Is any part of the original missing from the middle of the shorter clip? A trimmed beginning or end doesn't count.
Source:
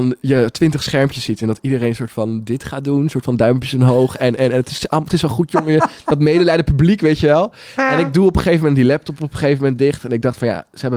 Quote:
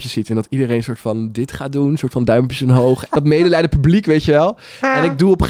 yes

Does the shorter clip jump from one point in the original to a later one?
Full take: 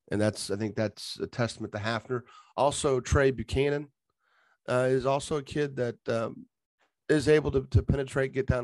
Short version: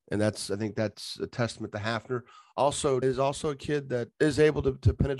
yes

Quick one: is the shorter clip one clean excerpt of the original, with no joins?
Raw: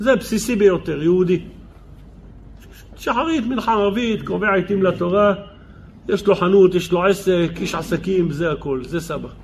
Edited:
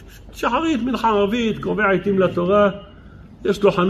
yes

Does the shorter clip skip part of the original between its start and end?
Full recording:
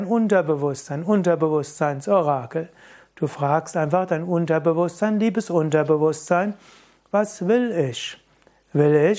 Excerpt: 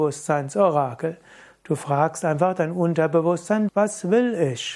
yes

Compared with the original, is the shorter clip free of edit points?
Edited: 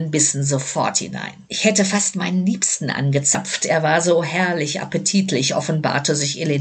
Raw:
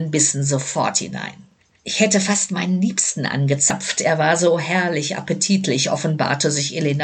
no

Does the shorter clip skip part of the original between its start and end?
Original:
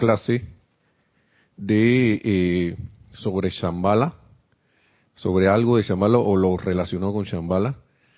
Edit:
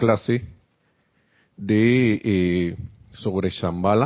no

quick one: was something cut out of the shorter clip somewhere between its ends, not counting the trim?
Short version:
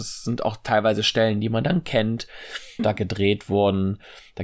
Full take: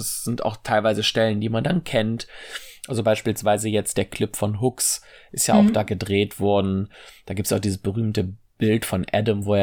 yes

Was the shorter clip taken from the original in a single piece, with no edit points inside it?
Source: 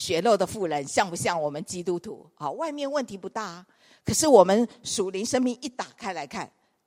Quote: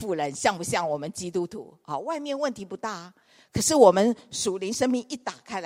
yes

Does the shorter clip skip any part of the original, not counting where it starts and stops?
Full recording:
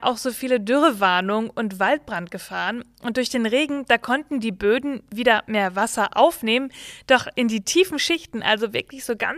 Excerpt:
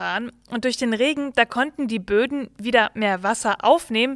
no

